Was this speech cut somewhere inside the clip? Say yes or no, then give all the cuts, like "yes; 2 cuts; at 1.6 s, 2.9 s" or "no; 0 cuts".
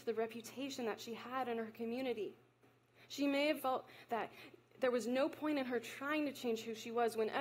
yes; 1 cut; at 3.6 s